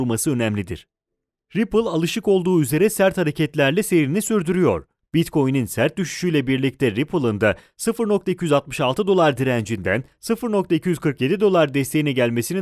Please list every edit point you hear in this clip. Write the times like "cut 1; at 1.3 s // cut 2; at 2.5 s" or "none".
none